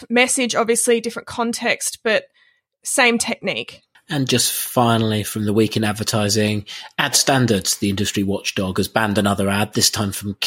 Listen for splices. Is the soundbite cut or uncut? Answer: uncut